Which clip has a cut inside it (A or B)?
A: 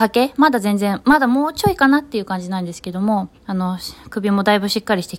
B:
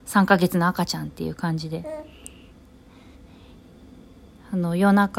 A